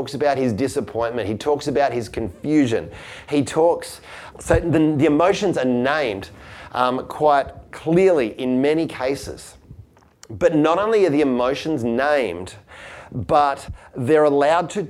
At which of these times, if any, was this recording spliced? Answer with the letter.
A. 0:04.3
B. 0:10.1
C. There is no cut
A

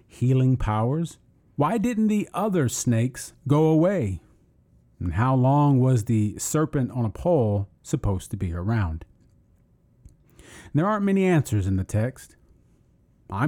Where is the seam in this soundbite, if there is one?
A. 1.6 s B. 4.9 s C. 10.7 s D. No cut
A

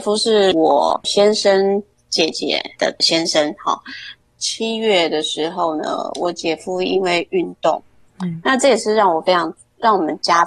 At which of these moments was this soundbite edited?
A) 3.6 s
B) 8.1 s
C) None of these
B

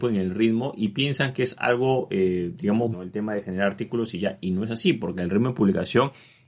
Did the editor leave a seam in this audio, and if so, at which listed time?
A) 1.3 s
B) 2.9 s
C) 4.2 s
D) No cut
B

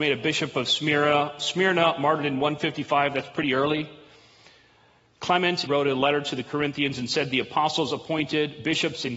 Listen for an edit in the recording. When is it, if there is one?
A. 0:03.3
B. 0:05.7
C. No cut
B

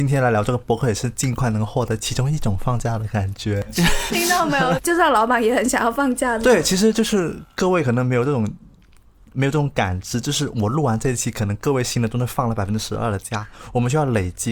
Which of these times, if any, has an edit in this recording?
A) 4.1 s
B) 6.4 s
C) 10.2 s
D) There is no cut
A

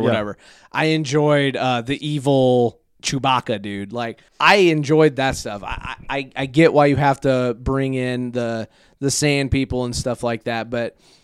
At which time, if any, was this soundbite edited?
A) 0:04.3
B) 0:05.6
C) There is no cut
A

